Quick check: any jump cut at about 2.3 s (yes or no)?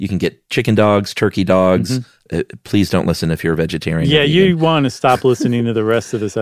yes